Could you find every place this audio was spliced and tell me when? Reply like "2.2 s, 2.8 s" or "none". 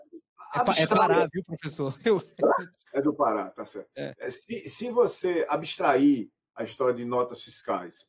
2.9 s